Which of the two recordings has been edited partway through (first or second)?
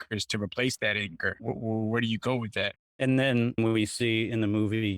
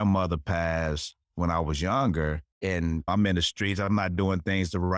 second